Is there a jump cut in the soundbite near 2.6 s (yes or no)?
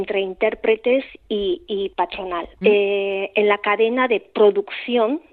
yes